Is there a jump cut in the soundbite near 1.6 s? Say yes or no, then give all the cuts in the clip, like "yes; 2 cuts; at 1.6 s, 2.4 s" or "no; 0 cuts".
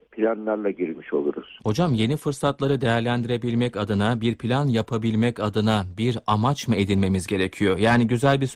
yes; 1 cut; at 1.6 s